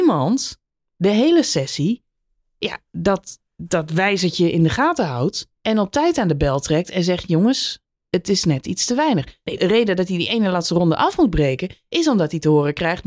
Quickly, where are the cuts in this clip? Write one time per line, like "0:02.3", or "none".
0:05.6
0:09.6